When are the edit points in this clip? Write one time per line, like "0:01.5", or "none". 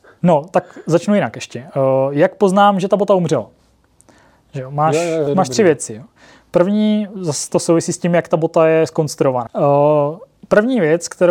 0:05.3
0:09.5

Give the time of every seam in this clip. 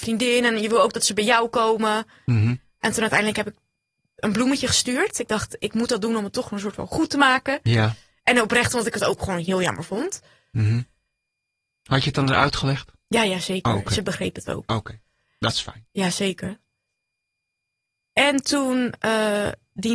none

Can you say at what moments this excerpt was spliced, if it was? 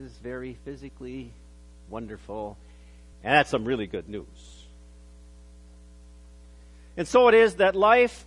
none

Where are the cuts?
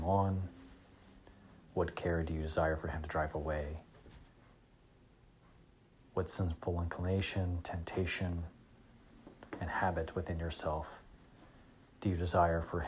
none

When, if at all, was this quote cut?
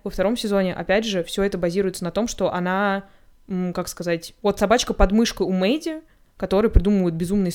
0:04.4

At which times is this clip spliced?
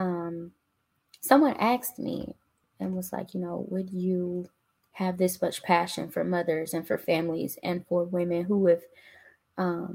none

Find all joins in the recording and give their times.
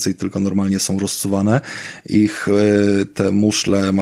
none

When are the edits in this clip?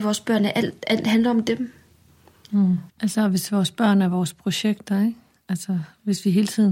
0:02.9

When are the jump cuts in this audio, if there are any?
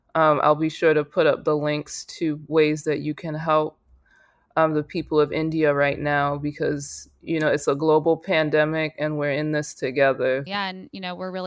0:10.5

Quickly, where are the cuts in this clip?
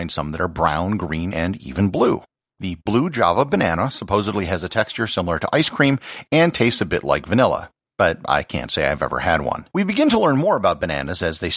0:01.3
0:09.7

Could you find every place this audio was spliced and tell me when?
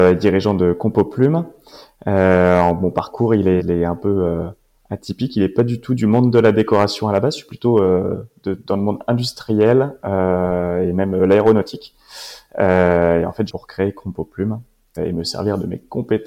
0:03.6
0:13.5
0:15.0

